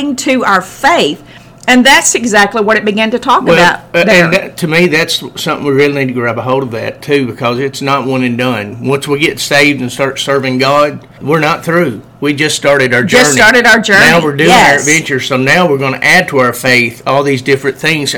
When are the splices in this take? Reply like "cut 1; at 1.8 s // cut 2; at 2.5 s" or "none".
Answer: cut 1; at 11.2 s